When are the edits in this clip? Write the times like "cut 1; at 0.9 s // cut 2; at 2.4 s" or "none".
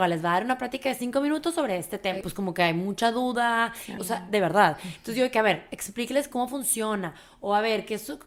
cut 1; at 2.2 s // cut 2; at 4.0 s